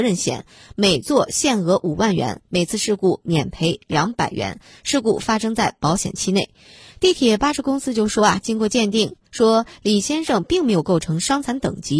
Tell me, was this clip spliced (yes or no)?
no